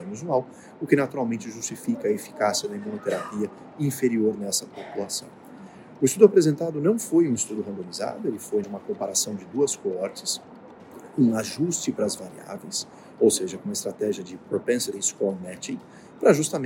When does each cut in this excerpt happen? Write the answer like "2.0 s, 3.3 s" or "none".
8.6 s